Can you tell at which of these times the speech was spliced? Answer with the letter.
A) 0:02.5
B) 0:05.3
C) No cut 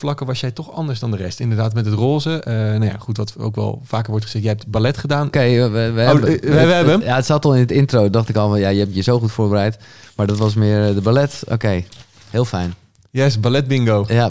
B